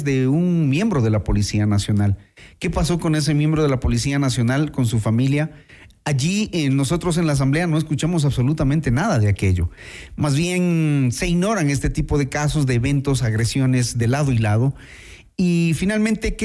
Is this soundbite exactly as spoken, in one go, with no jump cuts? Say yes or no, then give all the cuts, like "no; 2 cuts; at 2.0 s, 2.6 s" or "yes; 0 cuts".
yes; 0 cuts